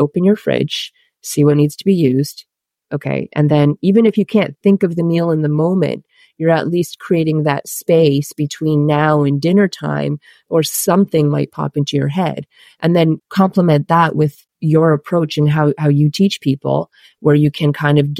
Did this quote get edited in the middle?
no; 0 cuts

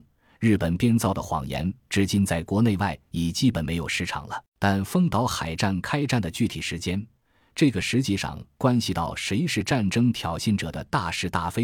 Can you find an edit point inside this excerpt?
yes; 1 cut; at 4.5 s

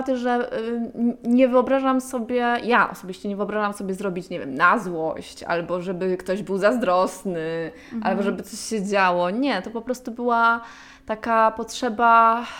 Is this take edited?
no; 0 cuts

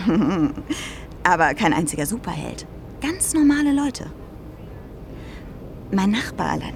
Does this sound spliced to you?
no; 0 cuts

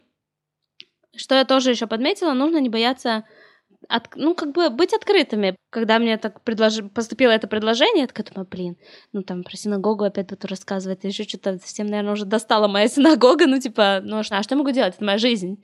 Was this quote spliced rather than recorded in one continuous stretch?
yes; 1 cut; at 14.3 s

